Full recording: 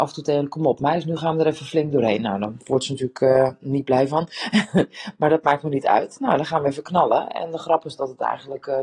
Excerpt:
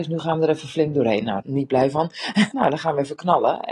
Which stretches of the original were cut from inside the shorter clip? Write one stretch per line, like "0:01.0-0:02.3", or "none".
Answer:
0:02.4-0:03.6
0:04.7-0:06.2